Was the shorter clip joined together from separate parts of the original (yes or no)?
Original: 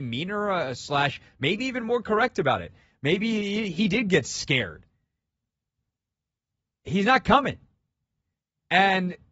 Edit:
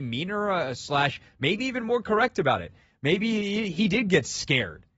no